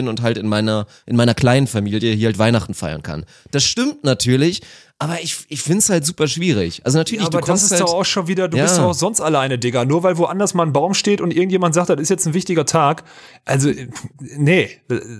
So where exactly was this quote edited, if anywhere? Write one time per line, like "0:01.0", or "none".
none